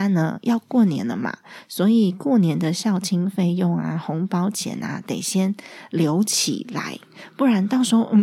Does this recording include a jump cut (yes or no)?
no